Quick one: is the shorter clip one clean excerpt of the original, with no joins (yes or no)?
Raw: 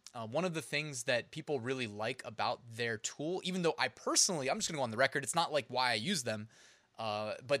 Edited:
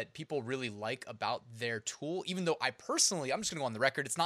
yes